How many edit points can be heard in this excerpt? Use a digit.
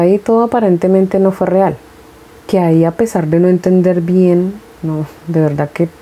1